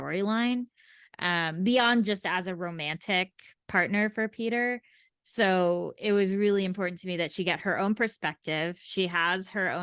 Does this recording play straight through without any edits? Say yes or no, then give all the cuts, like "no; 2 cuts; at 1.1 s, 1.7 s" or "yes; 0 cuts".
yes; 0 cuts